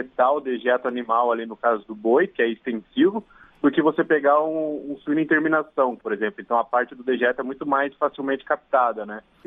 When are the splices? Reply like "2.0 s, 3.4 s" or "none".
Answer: 6.0 s